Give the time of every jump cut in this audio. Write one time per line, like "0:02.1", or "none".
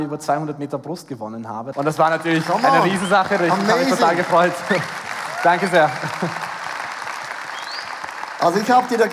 0:01.7